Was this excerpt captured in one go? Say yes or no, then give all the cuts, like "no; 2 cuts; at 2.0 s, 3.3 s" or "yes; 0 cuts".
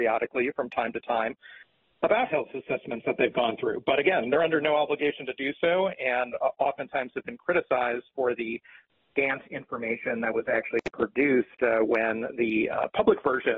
yes; 0 cuts